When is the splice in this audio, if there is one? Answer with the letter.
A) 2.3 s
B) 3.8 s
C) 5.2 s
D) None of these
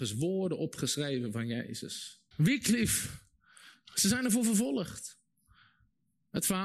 A